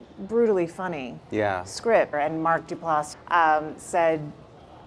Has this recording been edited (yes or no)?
yes